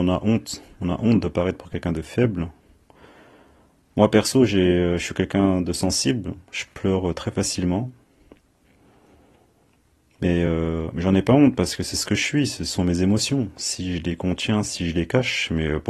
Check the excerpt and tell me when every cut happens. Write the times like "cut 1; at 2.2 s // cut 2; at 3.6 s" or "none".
none